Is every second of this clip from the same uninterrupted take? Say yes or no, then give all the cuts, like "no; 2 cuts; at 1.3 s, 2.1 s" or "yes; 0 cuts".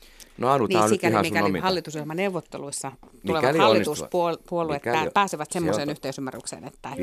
yes; 0 cuts